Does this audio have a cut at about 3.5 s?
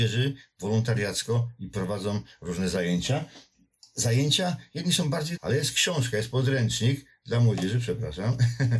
no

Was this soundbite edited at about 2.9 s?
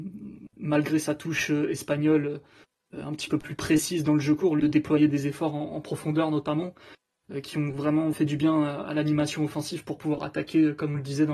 no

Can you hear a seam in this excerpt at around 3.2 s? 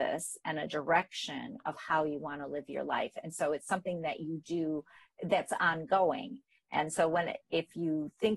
no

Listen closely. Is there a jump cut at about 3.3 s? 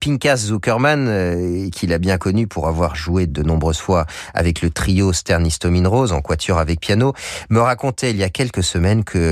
yes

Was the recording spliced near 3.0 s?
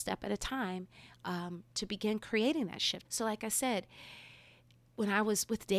yes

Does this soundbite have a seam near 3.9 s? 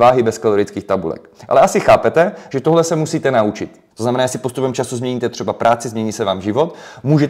yes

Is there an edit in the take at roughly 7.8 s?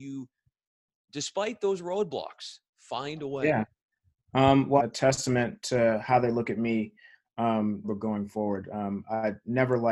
yes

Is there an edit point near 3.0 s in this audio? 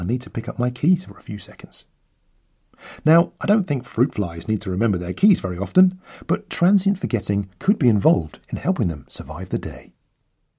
no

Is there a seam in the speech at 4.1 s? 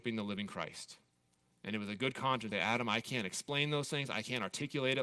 no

